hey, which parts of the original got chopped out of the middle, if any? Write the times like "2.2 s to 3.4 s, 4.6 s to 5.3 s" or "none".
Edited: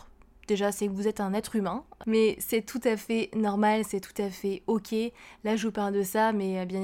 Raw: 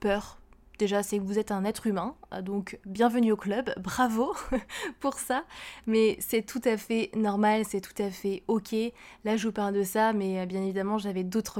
2.3 s to 5.8 s